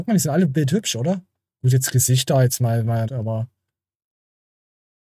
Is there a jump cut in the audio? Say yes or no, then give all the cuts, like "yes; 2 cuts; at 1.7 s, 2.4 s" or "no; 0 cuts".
yes; 1 cut; at 3.0 s